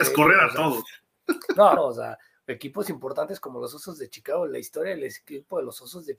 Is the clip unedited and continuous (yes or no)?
no